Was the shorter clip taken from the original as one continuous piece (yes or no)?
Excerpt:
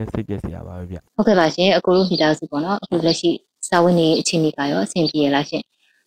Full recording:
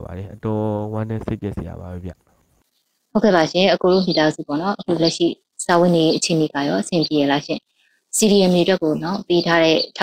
no